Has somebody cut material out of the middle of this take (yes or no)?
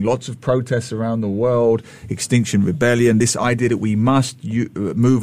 no